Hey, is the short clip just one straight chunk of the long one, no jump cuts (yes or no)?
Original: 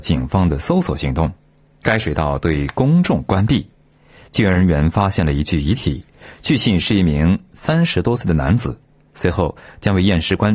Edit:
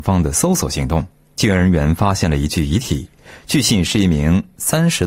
no